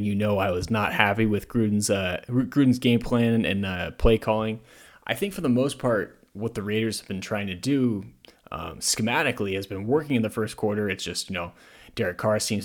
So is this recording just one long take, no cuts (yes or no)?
yes